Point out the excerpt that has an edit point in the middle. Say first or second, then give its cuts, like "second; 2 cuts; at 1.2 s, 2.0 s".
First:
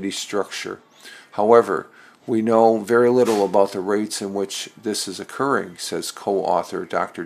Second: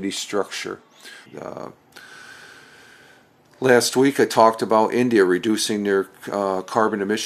second; 1 cut; at 1.3 s